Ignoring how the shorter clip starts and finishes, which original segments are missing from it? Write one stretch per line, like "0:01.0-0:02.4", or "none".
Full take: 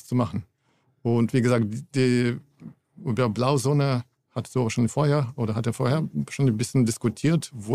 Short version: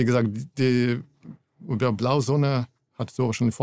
none